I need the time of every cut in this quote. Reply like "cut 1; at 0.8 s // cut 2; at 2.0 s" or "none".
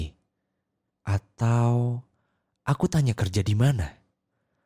cut 1; at 0.9 s